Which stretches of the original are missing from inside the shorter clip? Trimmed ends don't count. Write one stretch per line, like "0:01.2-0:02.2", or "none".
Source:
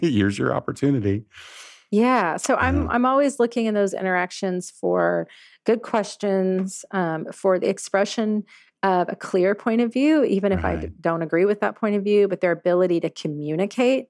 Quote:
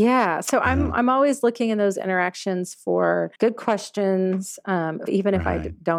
0:05.3-0:05.6
0:07.3-0:10.3